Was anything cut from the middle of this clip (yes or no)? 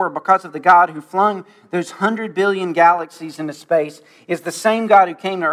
no